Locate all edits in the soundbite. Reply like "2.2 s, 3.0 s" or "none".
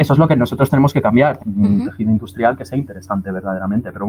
1.4 s